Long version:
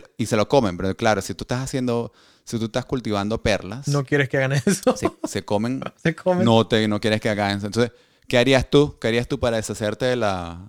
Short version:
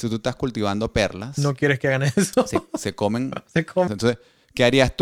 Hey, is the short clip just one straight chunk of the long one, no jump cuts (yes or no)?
no